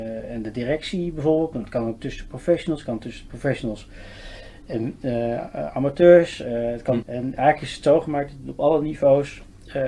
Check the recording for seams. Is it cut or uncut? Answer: cut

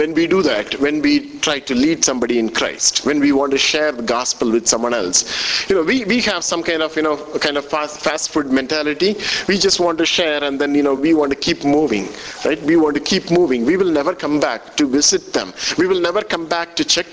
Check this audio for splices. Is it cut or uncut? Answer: uncut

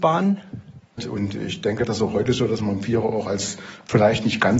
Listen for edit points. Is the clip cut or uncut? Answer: cut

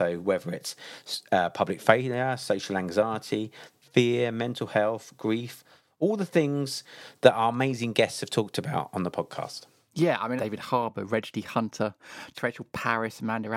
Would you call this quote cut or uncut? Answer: cut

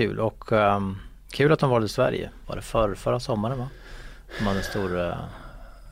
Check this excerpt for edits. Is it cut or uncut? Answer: cut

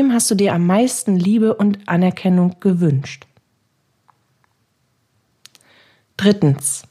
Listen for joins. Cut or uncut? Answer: uncut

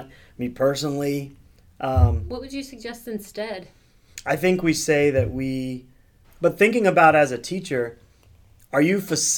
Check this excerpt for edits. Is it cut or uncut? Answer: cut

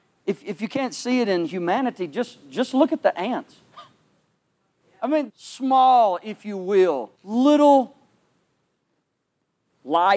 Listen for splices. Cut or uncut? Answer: cut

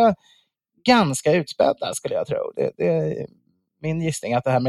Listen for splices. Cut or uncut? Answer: uncut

